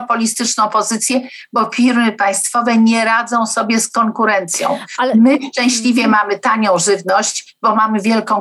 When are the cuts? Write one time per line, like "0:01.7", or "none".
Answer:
none